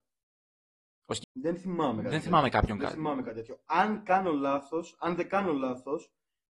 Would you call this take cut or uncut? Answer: cut